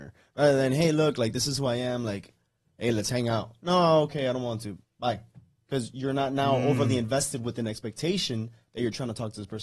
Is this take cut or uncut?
cut